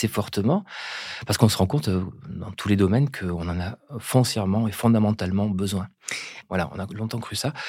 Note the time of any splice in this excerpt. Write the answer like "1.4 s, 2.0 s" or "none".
6.4 s